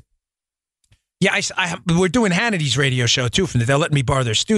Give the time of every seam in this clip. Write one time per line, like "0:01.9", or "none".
none

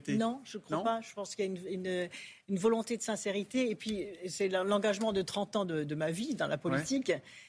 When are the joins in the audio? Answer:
none

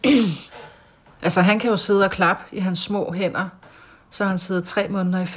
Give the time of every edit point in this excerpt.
0:01.1

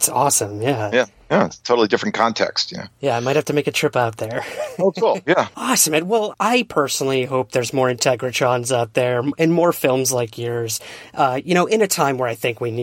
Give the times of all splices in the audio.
0:06.3

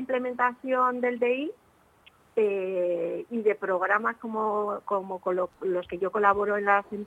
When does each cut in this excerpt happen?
none

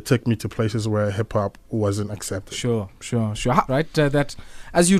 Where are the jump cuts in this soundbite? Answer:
0:03.7

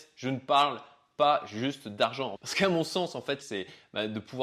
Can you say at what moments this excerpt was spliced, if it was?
0:02.3
0:03.4

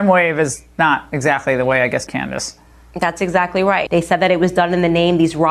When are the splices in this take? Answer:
0:02.1
0:03.9

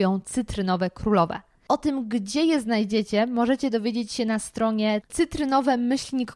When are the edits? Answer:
none

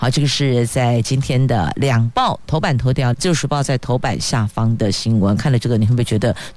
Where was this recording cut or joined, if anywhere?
0:03.1

